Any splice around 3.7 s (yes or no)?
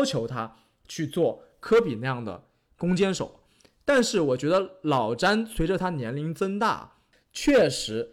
no